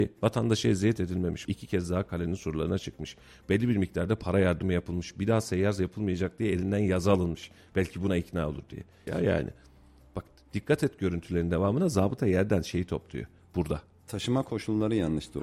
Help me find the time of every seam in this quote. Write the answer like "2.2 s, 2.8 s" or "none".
1.4 s, 9.1 s